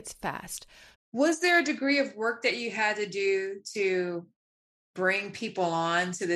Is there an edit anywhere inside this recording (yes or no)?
yes